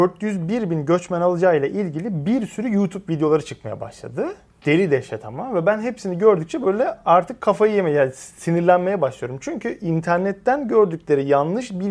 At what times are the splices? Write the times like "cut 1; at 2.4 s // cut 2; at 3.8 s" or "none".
none

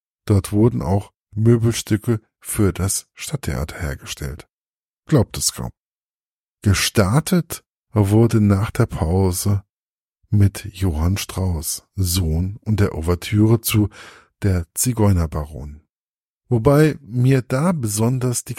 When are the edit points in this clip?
cut 1; at 1.3 s

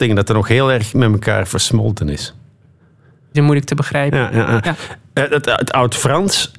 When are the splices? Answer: cut 1; at 3.3 s

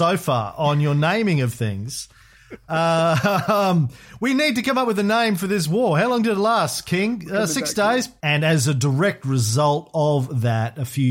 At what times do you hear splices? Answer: cut 1; at 8.2 s

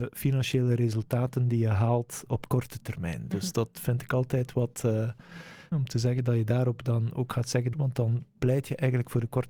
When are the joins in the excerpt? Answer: cut 1; at 5.7 s // cut 2; at 7.7 s

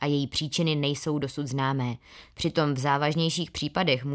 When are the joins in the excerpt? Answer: cut 1; at 2.3 s

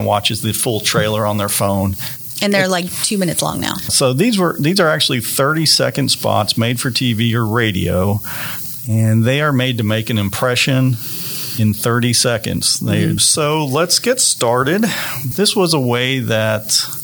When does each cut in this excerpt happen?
cut 1; at 3.9 s // cut 2; at 13.2 s // cut 3; at 15.3 s

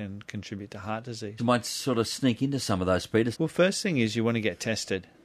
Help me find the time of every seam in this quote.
cut 1; at 1.4 s // cut 2; at 3.3 s

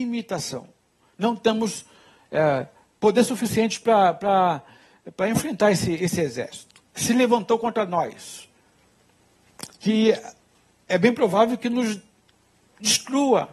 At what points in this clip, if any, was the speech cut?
none

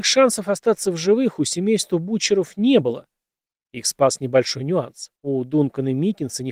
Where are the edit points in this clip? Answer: cut 1; at 5.2 s

